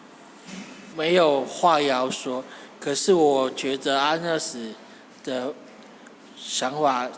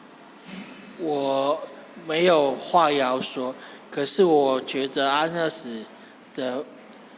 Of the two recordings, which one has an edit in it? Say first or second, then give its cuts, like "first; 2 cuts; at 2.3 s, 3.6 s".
first; 1 cut; at 0.9 s